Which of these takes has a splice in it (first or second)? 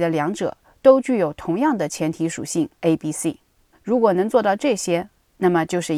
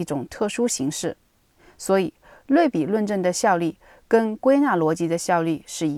first